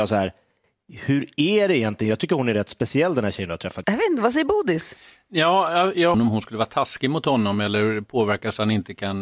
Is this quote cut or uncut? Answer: cut